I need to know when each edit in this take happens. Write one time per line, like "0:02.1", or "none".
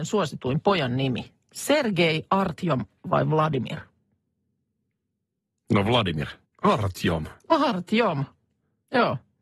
0:06.5